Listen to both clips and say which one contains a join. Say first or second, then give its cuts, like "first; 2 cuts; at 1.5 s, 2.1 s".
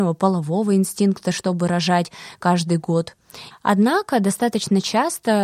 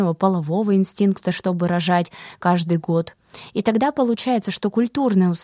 first; 1 cut; at 3.5 s